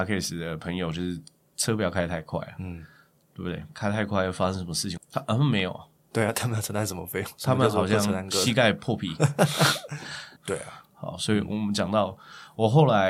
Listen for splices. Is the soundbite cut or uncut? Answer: cut